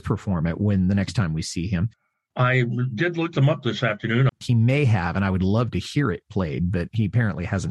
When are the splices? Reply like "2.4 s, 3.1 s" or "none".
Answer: 2.1 s, 4.3 s